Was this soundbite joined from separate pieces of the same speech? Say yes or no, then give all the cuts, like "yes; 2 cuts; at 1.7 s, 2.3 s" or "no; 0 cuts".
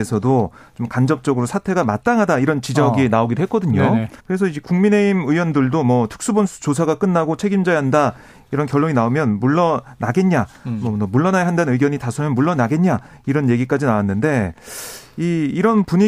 yes; 1 cut; at 4.2 s